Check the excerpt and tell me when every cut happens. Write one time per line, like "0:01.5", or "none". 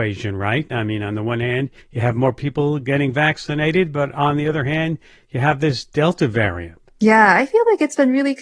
0:01.8